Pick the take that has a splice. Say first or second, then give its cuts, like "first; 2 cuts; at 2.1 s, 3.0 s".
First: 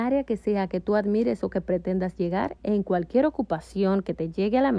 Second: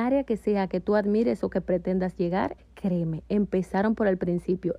second; 1 cut; at 2.6 s